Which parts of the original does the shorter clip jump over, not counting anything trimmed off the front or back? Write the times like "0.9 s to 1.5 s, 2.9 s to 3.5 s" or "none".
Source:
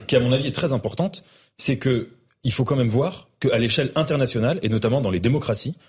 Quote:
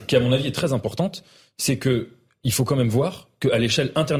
none